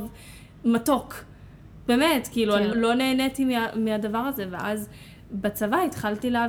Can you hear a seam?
yes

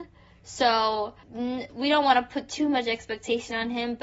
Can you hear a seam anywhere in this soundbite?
yes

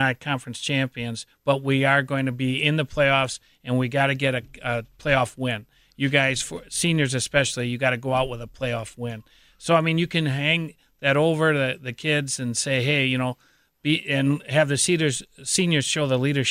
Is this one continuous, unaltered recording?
yes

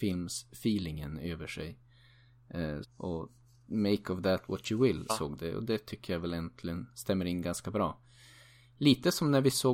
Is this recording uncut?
no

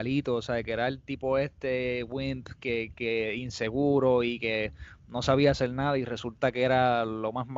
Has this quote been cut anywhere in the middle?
no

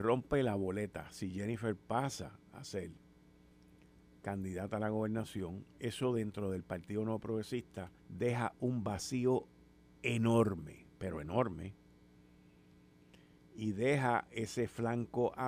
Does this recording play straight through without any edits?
no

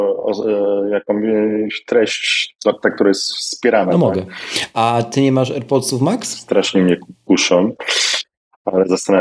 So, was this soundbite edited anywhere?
no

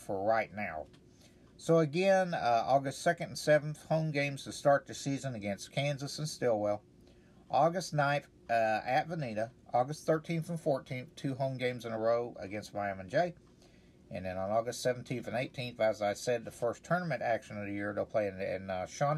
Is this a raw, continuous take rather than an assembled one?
yes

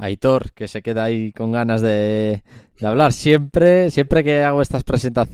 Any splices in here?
no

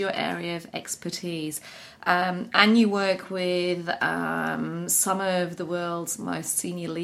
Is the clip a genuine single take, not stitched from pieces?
yes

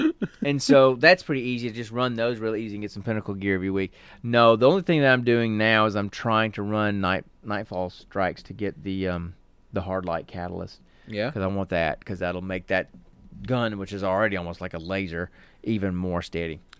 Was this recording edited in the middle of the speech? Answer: no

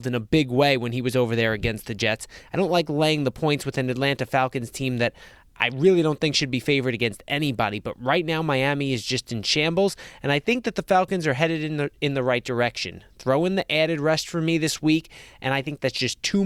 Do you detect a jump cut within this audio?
yes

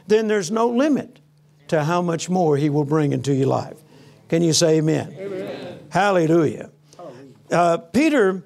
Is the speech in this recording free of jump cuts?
yes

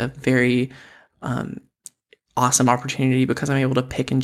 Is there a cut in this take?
no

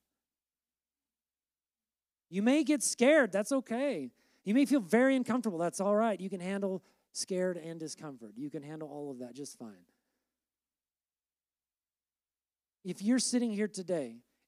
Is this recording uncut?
yes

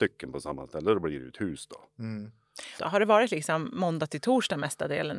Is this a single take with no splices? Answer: no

